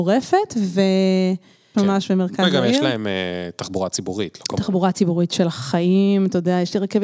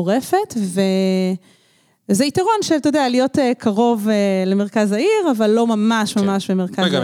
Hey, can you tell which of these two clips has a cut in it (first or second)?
first